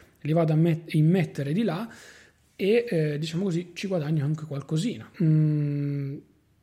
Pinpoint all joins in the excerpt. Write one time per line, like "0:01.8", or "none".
0:05.1